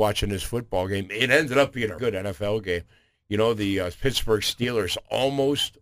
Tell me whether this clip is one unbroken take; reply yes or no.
no